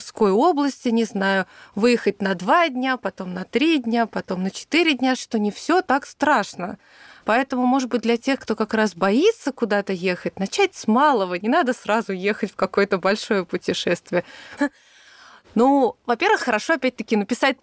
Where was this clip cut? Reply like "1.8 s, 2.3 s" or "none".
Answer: 5.2 s, 14.6 s